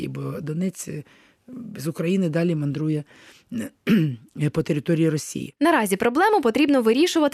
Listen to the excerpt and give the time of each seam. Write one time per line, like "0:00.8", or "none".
none